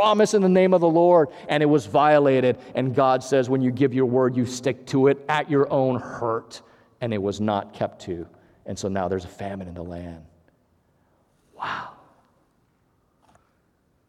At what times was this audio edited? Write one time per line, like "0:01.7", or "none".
none